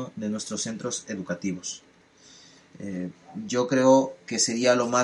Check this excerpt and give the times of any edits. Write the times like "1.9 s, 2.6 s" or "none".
none